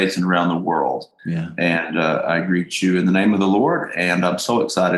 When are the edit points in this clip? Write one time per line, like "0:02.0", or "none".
none